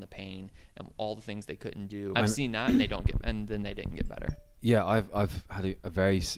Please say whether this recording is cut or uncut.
cut